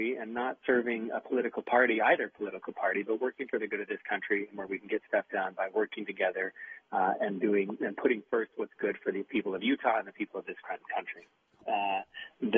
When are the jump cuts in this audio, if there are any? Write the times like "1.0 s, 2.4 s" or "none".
11.6 s